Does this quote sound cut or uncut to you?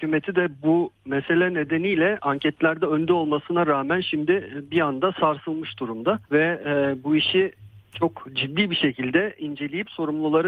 cut